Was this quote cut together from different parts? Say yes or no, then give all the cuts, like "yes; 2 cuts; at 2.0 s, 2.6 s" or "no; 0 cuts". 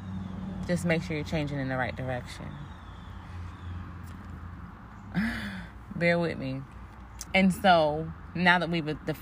yes; 2 cuts; at 4.7 s, 7.3 s